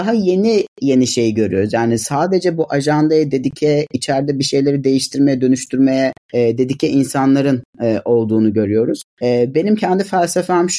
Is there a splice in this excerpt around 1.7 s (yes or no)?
no